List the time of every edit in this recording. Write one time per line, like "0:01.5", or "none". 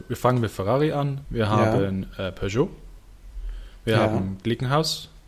0:01.2